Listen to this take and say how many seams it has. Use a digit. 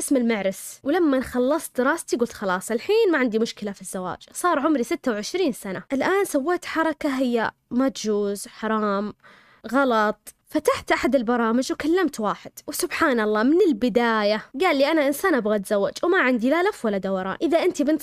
1